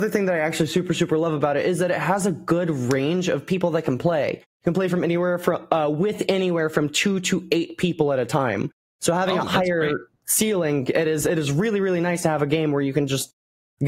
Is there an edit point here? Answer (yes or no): no